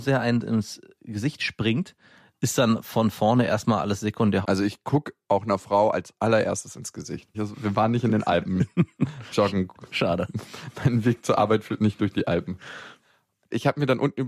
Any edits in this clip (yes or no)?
yes